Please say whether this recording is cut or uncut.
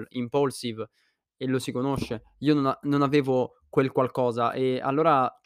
uncut